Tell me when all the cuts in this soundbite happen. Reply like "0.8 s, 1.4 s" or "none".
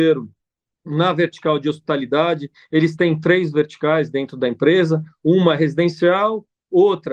none